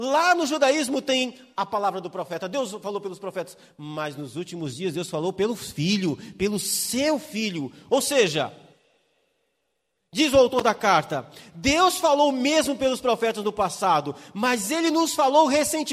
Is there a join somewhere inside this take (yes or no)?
no